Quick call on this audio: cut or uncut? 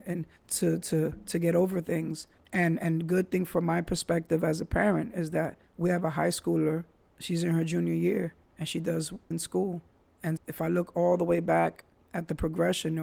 cut